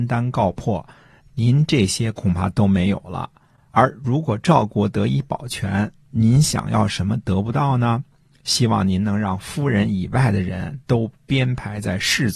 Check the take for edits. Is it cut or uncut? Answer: uncut